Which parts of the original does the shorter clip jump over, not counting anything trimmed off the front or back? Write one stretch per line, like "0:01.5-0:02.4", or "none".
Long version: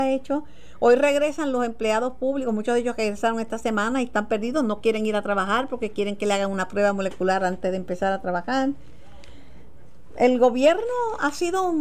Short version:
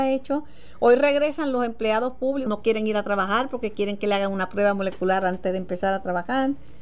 0:02.5-0:04.7